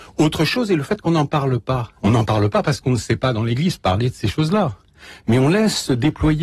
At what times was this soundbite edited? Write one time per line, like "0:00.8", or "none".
0:02.0